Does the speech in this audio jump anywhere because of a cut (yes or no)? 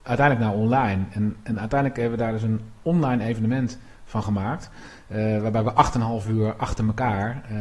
no